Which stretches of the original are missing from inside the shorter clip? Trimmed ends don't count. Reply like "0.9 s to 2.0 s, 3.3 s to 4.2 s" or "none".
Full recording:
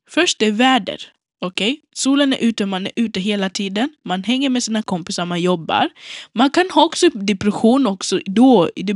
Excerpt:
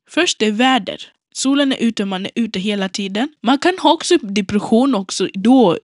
1.3 s to 1.9 s, 4.0 s to 6.3 s